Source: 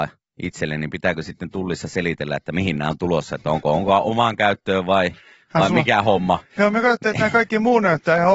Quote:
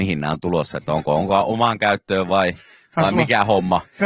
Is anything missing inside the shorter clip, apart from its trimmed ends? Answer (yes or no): no